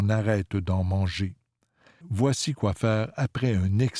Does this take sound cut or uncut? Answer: cut